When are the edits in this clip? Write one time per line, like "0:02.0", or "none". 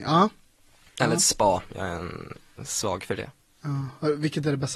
none